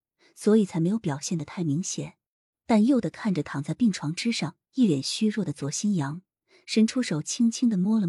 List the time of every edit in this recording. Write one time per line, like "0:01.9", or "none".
0:02.5